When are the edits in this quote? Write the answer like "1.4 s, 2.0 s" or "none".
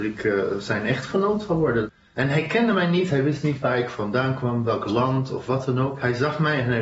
none